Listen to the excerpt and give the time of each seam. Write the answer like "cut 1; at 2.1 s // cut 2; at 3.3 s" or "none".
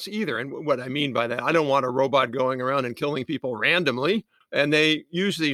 cut 1; at 4.4 s

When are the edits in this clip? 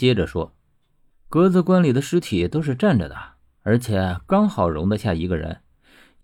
none

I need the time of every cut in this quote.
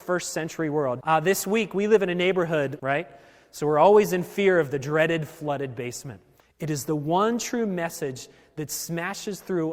cut 1; at 1.0 s // cut 2; at 2.8 s // cut 3; at 6.4 s

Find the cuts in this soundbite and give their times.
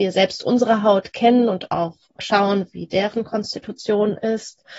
cut 1; at 2.2 s

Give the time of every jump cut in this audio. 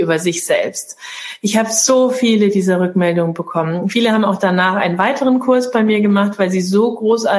none

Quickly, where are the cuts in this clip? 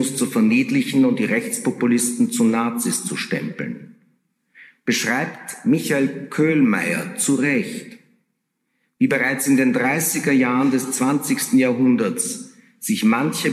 none

